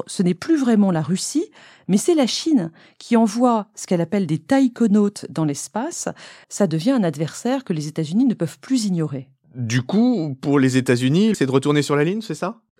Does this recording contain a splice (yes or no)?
yes